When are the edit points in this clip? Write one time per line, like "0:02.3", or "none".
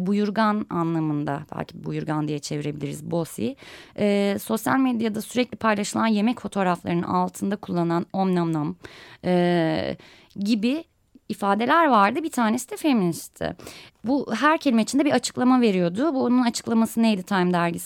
0:13.9